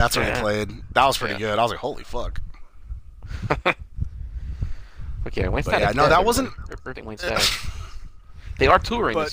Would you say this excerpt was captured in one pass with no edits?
no; 1 cut; at 6.9 s

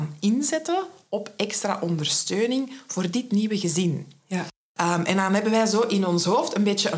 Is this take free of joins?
no; 1 cut; at 4.7 s

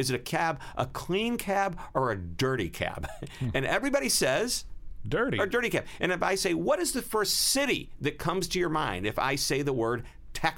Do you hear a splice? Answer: no; 0 cuts

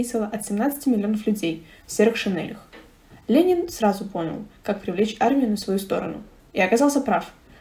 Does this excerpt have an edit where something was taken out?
yes; 1 cut; at 6.4 s

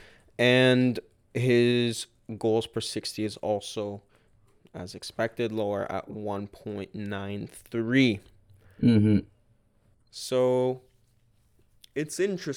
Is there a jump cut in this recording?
yes; 1 cut; at 9.9 s

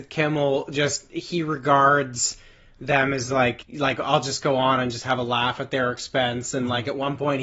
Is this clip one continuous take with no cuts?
yes; 0 cuts

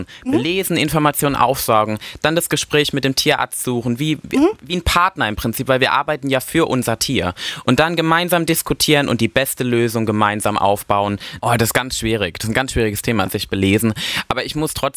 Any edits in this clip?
yes; 2 cuts; at 11.4 s, 13.3 s

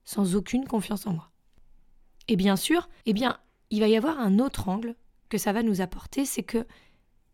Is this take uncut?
no; 1 cut; at 3.0 s

